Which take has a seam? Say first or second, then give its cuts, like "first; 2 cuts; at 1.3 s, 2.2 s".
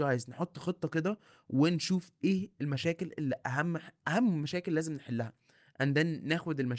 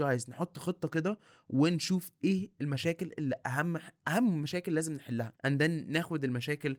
second; 1 cut; at 5.4 s